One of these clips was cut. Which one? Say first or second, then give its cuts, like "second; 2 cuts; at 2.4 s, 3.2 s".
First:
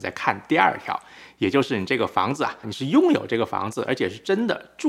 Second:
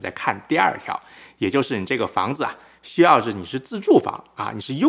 first; 1 cut; at 2.6 s